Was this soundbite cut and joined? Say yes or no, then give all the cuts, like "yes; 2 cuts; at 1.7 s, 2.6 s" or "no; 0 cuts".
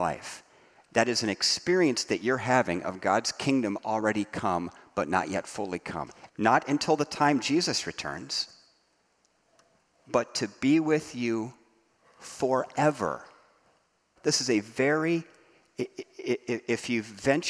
yes; 2 cuts; at 6.3 s, 14.2 s